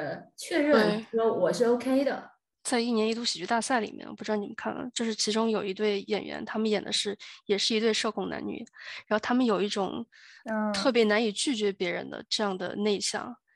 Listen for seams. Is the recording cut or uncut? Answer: cut